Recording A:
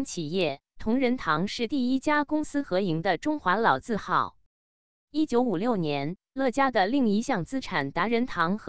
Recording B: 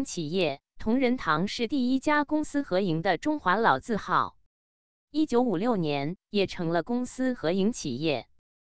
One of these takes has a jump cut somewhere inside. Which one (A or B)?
B